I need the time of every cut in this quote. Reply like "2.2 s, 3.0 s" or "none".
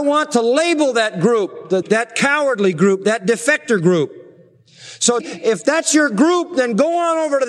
1.8 s, 5.2 s